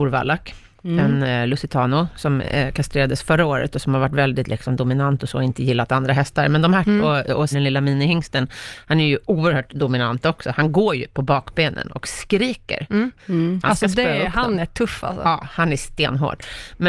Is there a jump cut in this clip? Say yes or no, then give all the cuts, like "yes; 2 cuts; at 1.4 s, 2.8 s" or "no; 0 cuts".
yes; 2 cuts; at 7.5 s, 13.2 s